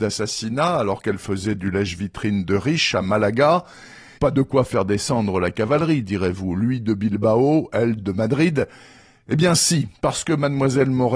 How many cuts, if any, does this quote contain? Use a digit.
1